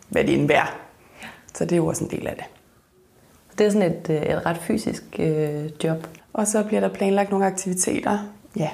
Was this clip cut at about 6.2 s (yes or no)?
yes